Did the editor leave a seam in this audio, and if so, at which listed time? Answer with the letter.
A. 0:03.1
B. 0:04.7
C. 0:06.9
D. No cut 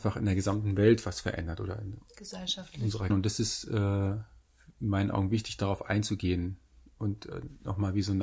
A